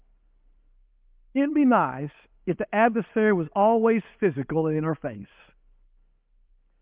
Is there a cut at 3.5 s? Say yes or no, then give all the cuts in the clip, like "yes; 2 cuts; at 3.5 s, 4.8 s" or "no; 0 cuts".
no; 0 cuts